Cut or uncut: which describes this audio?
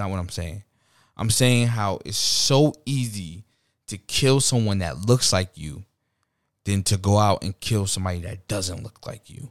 uncut